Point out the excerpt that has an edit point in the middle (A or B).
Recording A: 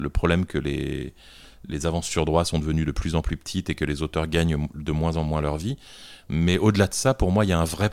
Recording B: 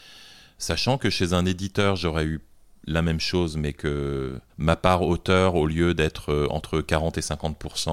B